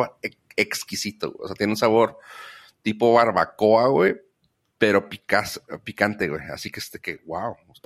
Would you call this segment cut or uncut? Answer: uncut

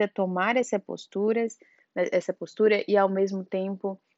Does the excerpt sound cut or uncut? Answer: uncut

